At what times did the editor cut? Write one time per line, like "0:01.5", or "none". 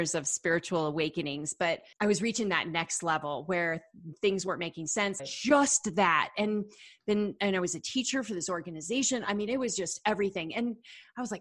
0:01.9
0:05.2